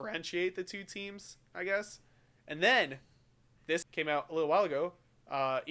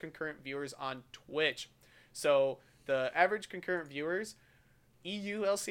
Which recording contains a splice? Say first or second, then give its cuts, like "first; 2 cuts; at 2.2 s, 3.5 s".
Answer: first; 2 cuts; at 2.4 s, 3.8 s